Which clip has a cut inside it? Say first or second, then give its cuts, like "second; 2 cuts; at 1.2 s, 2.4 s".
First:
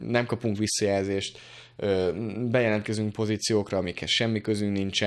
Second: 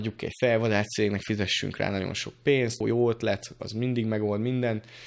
second; 1 cut; at 2.8 s